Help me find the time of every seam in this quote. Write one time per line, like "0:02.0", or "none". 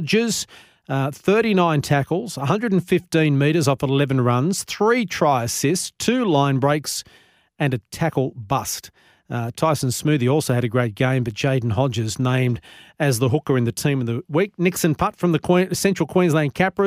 none